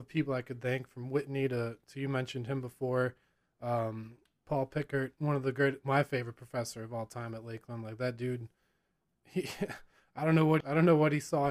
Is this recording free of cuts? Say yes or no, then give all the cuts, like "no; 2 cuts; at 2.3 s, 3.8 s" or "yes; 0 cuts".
no; 1 cut; at 10.6 s